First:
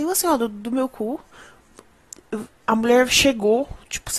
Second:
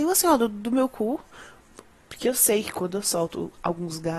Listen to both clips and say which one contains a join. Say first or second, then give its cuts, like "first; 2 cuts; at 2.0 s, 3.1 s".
second; 1 cut; at 2.1 s